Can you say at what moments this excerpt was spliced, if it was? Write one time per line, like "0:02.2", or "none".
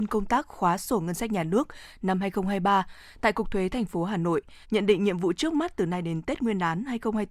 0:04.6